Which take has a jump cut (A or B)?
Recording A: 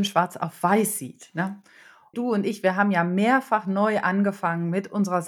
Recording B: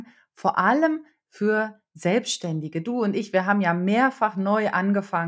A